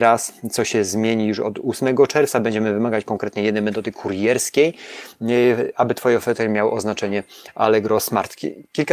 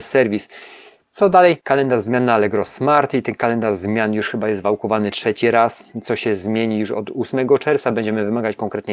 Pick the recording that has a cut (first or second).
second